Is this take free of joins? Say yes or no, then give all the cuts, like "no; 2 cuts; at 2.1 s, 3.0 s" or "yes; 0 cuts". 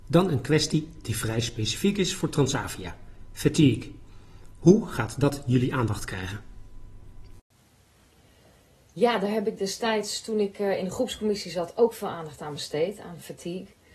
yes; 0 cuts